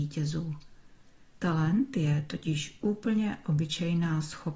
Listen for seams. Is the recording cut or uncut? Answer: cut